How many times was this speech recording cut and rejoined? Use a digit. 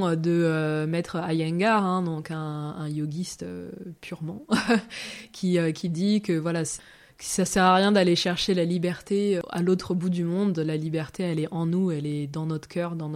0